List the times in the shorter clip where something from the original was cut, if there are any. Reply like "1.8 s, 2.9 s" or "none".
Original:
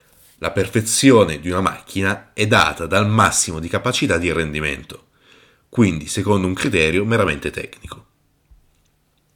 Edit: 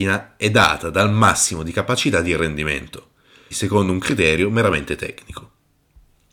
3.5 s